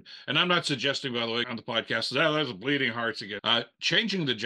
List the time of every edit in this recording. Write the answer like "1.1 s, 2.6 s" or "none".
1.4 s, 3.4 s